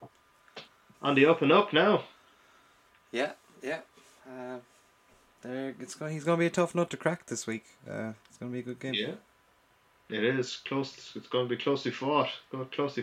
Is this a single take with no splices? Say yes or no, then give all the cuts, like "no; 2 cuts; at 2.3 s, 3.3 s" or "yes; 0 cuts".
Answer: no; 1 cut; at 0.9 s